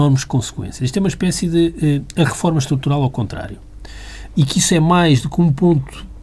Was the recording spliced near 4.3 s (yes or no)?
yes